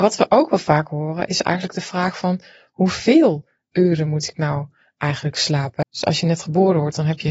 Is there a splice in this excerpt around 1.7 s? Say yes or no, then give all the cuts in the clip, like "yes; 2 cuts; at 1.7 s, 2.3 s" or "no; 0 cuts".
no; 1 cut; at 5.8 s